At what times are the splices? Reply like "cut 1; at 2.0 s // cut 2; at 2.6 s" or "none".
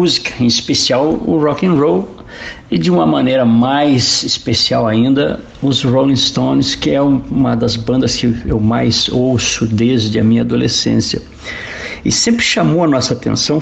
none

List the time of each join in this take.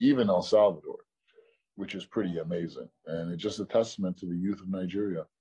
none

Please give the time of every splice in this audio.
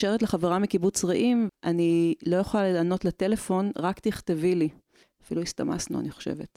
cut 1; at 1.5 s // cut 2; at 5.0 s

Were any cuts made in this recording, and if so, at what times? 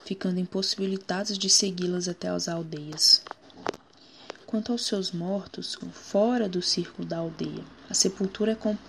cut 1; at 5.8 s

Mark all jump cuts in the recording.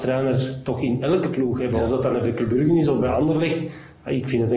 none

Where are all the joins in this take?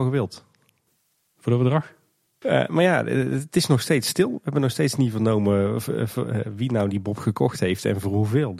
cut 1; at 2.4 s

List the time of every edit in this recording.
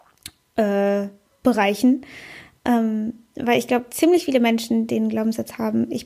none

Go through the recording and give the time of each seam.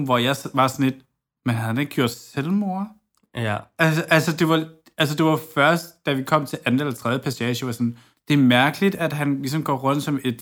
none

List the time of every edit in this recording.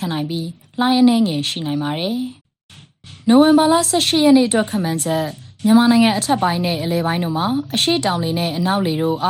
cut 1; at 2.4 s

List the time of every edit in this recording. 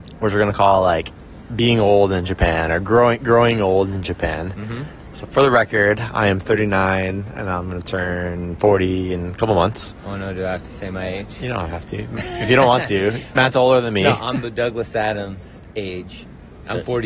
none

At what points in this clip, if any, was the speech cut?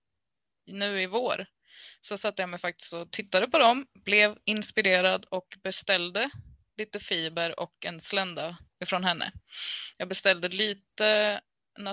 none

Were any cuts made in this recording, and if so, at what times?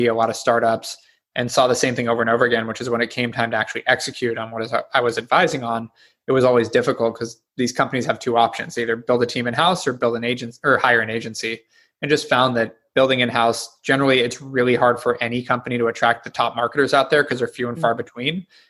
none

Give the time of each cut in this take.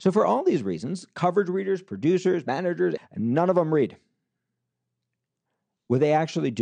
cut 1; at 3.0 s

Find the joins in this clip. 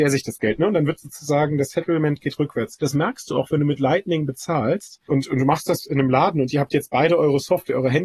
none

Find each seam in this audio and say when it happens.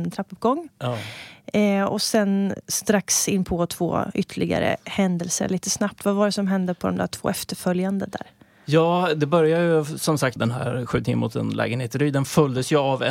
cut 1; at 10.4 s

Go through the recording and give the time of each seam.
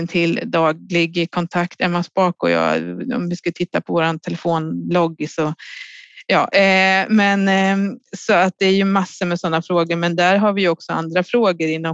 none

